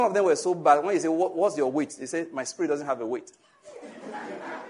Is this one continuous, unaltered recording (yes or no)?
yes